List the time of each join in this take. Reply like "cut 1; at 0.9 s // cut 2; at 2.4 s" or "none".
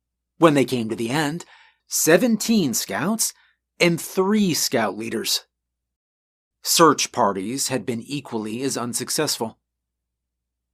cut 1; at 1.8 s // cut 2; at 6.5 s